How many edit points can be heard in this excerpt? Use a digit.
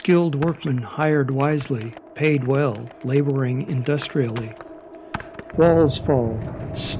1